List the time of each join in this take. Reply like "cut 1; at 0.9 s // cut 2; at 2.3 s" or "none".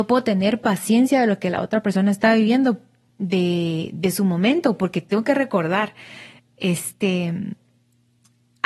none